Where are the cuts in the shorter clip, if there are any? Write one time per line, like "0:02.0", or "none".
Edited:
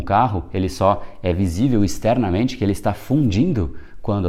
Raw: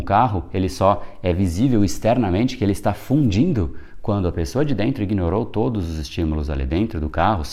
none